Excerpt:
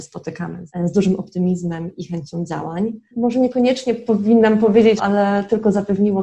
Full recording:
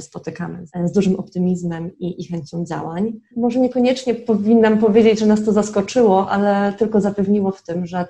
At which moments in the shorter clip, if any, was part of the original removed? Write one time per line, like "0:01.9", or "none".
0:02.0
0:05.0